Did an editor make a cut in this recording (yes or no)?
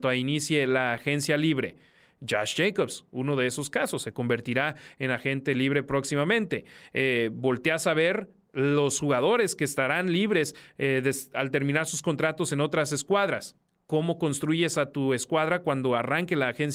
no